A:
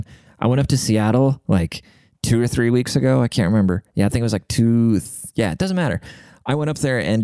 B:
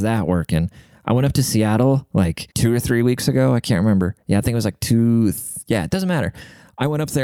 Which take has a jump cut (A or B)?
B